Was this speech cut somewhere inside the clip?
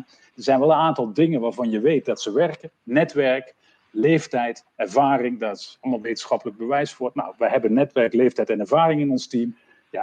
no; 0 cuts

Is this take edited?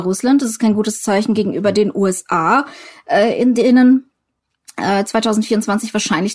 no; 0 cuts

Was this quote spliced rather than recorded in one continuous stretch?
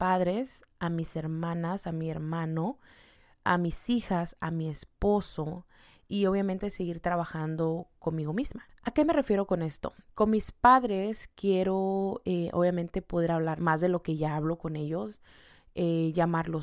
yes; 2 cuts; at 10.1 s, 13.6 s

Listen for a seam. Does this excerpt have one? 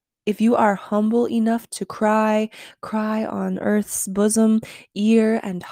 no; 0 cuts

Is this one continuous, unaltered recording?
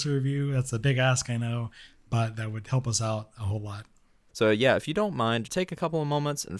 no; 2 cuts; at 4.3 s, 5.4 s

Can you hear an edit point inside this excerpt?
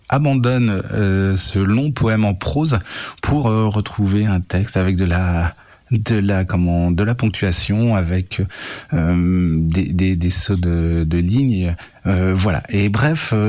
no; 0 cuts

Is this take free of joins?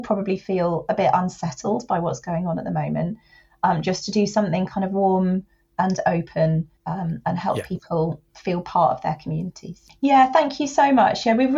no; 2 cuts; at 6.8 s, 9.9 s

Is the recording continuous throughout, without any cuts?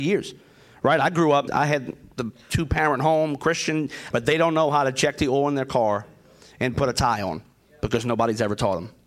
no; 2 cuts; at 1.5 s, 4.1 s

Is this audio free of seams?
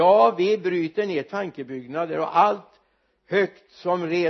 yes; 0 cuts

